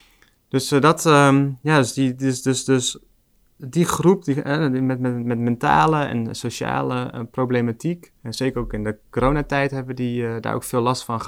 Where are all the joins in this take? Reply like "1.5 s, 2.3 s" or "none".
8.2 s